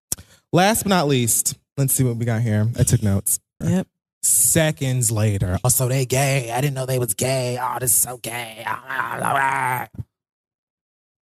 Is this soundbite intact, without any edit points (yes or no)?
no